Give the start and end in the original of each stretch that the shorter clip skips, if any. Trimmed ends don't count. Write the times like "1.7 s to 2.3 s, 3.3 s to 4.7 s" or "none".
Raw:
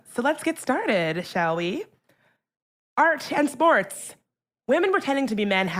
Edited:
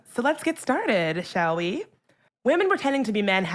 2.3 s to 4.5 s